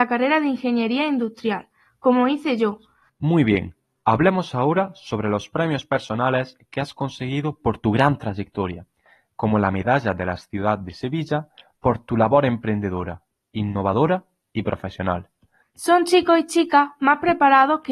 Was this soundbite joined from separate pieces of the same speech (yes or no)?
yes